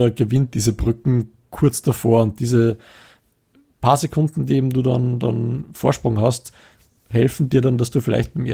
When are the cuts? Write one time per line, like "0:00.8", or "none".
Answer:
none